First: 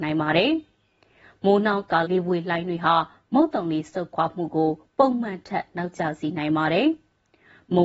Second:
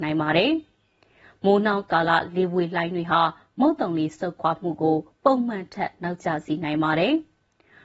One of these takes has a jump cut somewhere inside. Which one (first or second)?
first